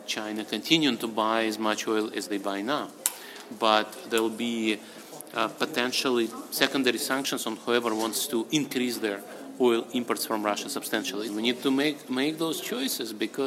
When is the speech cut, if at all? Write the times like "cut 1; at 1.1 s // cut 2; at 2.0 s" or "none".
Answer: cut 1; at 11.3 s